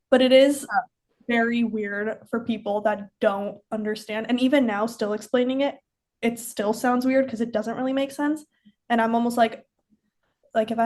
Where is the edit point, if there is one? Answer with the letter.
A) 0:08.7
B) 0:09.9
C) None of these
C